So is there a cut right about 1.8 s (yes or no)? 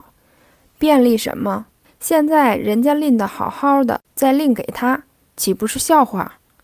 yes